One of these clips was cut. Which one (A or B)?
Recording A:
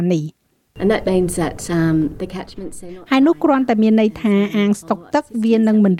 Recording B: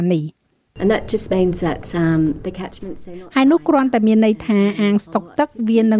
A